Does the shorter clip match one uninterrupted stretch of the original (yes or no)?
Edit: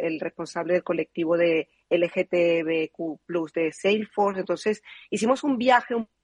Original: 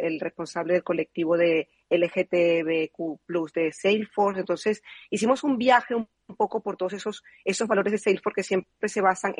yes